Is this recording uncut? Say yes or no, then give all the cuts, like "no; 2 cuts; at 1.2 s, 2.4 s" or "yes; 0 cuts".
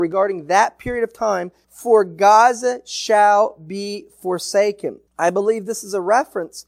yes; 0 cuts